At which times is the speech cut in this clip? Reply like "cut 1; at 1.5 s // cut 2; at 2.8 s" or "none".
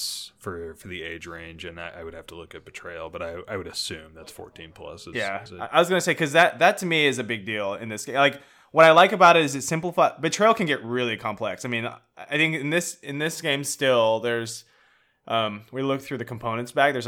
none